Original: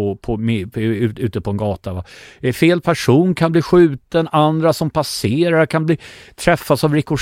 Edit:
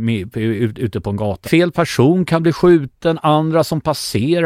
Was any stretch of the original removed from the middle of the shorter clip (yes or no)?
yes